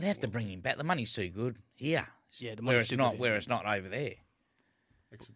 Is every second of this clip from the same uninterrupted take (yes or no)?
yes